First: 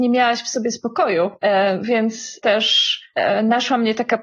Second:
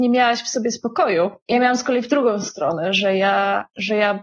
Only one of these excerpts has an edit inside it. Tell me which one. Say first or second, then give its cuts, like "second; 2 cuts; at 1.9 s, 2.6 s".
first; 1 cut; at 1.4 s